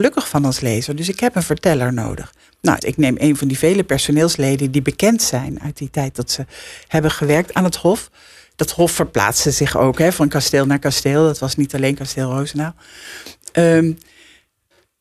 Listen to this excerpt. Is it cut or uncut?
cut